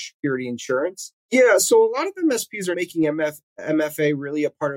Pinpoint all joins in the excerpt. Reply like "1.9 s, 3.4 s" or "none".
1.3 s, 2.7 s